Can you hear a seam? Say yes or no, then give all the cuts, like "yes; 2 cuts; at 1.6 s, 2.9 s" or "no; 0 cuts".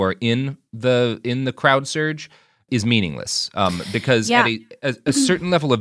yes; 1 cut; at 2.7 s